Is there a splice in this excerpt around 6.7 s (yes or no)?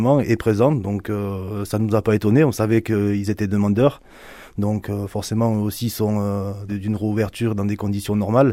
yes